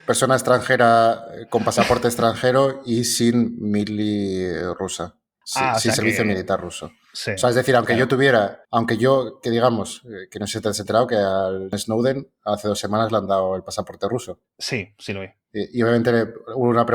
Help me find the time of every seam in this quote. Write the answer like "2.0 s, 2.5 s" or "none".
8.6 s